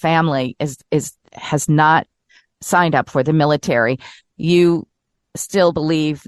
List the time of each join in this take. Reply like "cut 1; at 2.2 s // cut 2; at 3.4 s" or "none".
none